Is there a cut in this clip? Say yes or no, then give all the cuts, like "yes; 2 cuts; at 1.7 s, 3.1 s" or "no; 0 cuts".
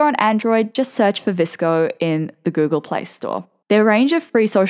yes; 1 cut; at 3.6 s